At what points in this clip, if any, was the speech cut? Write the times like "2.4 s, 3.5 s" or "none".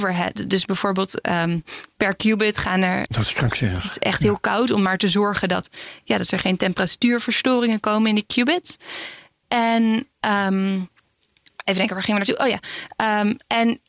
3.1 s